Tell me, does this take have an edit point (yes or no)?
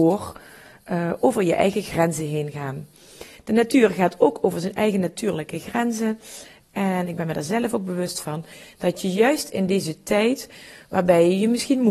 yes